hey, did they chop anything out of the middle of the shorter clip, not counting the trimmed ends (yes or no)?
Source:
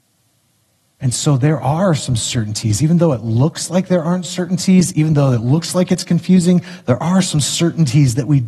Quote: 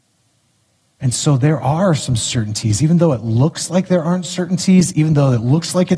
no